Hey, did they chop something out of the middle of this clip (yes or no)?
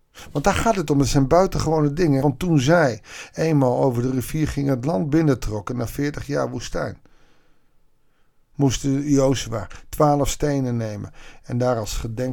yes